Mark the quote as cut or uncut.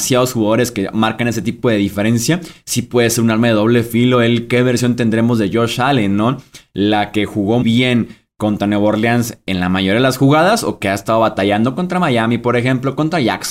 cut